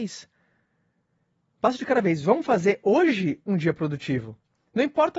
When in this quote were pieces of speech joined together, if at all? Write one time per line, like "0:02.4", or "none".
none